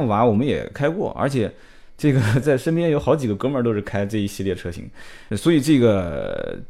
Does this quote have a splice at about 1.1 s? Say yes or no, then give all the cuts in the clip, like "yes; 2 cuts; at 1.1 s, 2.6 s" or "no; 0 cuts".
no; 2 cuts; at 2.4 s, 5.3 s